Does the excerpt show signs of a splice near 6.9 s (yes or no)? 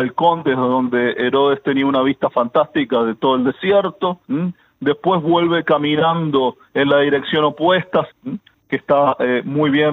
no